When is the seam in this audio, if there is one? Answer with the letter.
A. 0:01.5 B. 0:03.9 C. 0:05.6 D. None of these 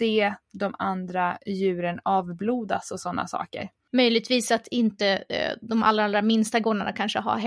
B